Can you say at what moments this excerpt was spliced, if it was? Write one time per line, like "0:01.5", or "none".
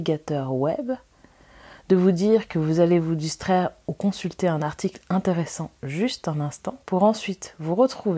0:06.8

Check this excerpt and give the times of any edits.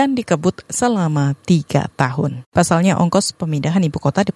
0:02.4

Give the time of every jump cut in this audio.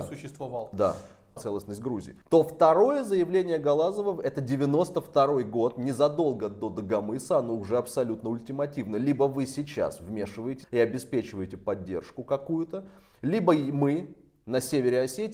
0:01.4
0:10.6

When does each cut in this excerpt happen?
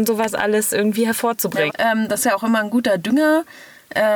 0:01.7

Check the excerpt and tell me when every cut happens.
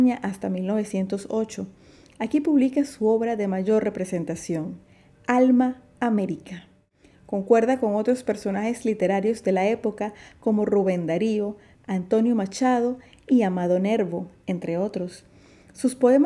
0:11.8

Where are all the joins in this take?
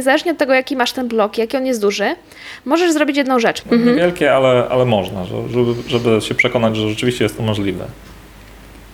0:03.6

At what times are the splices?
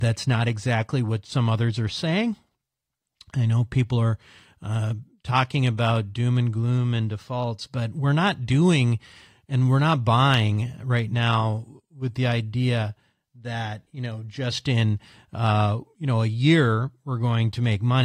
none

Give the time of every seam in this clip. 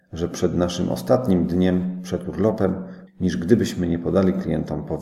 0:03.1

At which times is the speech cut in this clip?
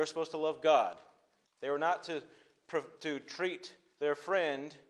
0:01.5

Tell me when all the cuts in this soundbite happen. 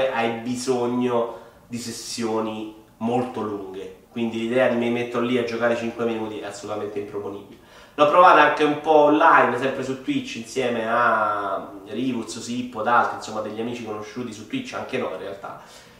none

